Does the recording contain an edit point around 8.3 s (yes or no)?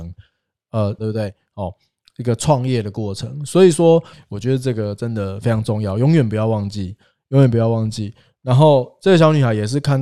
no